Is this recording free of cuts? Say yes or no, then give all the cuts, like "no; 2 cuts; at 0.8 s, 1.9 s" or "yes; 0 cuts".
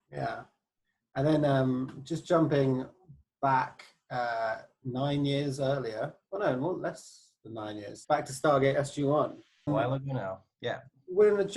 no; 2 cuts; at 8.0 s, 9.7 s